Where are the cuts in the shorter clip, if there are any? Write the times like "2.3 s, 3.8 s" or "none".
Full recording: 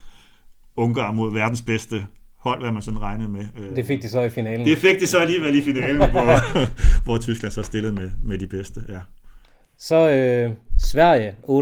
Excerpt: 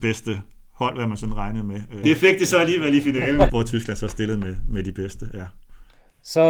2.0 s, 3.5 s